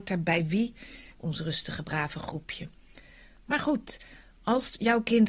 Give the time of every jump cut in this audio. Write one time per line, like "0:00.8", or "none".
0:01.1